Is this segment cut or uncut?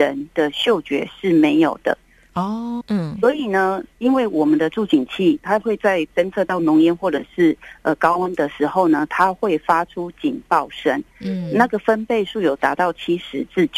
cut